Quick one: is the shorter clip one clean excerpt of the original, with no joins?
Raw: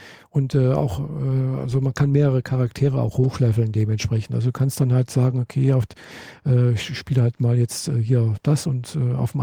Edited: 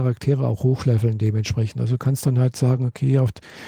yes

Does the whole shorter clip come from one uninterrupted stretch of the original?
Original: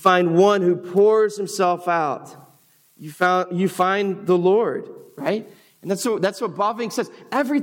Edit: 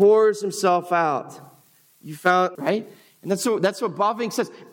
no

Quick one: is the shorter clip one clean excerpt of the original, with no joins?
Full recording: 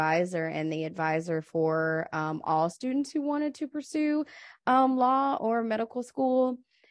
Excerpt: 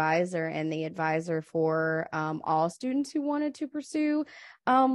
yes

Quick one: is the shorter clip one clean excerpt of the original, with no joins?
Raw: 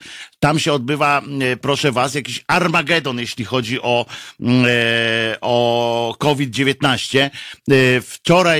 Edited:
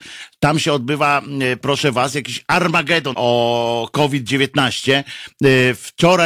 no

